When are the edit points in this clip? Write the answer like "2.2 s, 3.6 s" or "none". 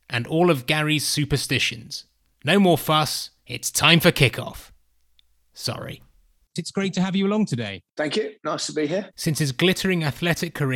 6.6 s, 9.1 s